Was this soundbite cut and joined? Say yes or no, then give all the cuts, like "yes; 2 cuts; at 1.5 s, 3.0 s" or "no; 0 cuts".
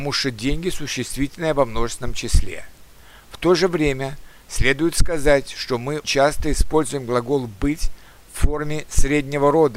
yes; 1 cut; at 6.0 s